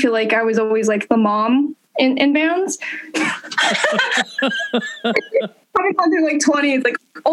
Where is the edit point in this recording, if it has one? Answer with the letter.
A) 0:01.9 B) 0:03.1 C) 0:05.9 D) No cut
B